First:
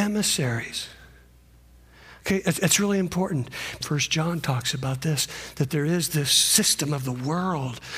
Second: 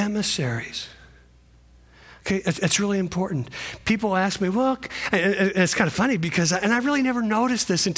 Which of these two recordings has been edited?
first; 1 cut; at 3.8 s

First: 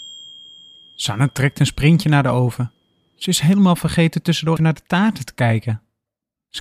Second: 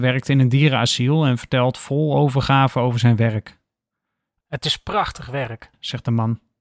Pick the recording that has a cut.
first; 1 cut; at 4.6 s

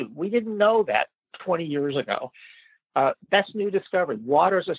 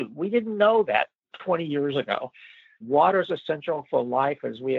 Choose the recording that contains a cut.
second; 1 cut; at 2.8 s

